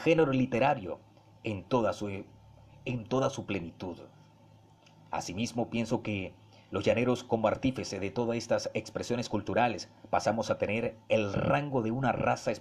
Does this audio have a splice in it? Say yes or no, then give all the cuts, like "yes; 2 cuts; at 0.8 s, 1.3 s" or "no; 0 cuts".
no; 0 cuts